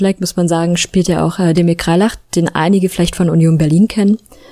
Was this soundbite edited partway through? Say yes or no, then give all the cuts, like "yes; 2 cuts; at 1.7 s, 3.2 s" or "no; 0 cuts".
no; 0 cuts